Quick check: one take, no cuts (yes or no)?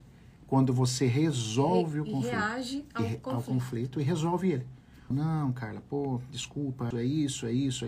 no